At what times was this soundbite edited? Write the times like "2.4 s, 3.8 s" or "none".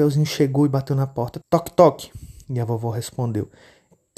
1.4 s